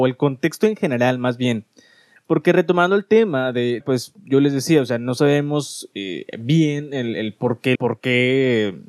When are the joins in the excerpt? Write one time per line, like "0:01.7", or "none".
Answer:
0:02.2
0:03.8
0:07.8